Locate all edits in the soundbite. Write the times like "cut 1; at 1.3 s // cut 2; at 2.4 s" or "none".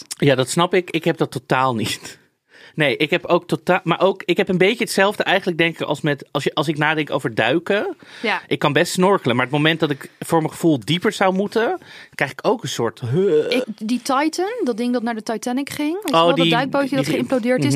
cut 1; at 13.6 s